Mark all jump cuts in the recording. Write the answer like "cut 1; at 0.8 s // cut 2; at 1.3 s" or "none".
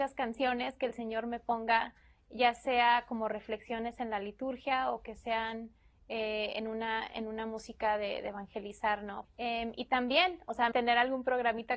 cut 1; at 9.2 s // cut 2; at 10.7 s